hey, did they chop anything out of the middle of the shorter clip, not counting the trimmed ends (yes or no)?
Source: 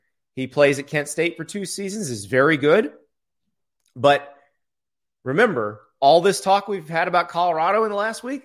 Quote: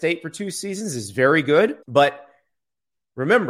yes